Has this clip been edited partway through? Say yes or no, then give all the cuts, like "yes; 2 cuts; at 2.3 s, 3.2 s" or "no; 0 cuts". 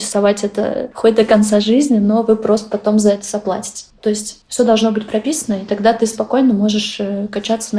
no; 0 cuts